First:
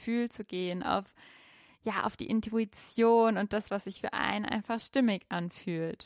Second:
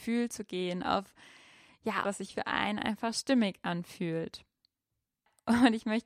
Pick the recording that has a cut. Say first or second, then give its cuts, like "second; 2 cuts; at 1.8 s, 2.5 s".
second; 1 cut; at 2.0 s